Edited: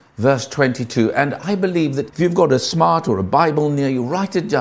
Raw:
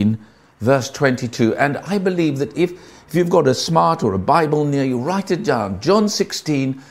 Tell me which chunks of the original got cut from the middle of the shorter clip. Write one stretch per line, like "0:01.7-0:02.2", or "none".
0:02.5-0:03.0